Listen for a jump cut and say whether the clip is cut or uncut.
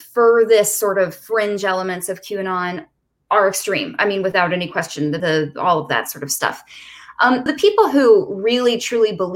cut